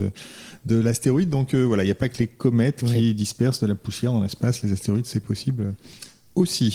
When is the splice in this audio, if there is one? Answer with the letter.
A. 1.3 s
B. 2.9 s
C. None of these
C